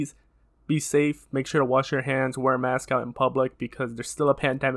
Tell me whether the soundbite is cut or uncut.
uncut